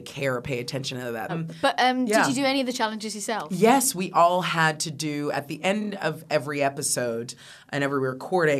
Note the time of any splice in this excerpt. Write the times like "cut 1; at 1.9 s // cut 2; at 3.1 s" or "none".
cut 1; at 1.3 s